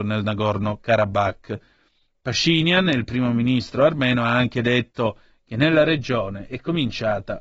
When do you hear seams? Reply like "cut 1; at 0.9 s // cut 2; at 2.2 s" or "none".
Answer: none